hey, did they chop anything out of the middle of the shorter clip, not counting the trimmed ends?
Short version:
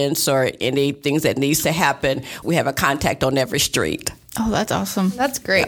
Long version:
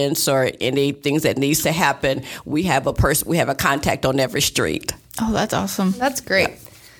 yes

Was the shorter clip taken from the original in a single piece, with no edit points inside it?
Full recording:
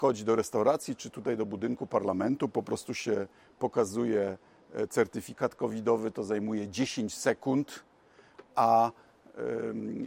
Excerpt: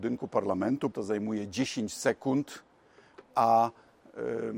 no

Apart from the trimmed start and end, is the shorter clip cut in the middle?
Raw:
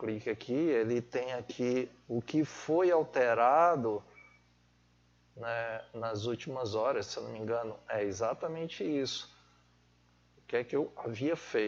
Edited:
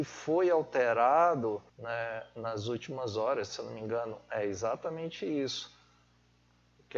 yes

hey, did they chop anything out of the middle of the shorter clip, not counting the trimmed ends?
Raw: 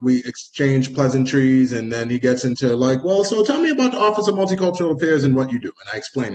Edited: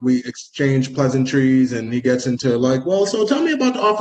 yes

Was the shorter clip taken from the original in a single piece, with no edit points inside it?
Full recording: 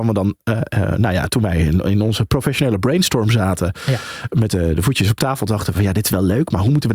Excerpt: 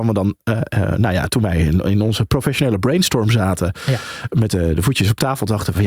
yes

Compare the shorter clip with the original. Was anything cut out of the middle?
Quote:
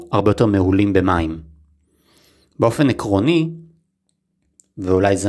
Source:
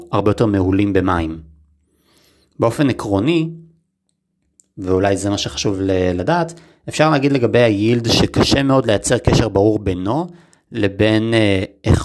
no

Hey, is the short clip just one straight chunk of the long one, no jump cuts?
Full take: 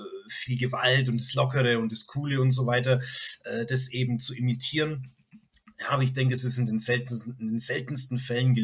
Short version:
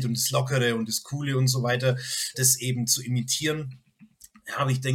no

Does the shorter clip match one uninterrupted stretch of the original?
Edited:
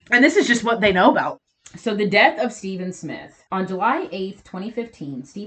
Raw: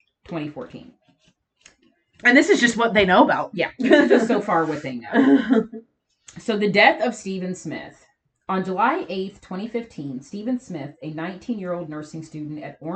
no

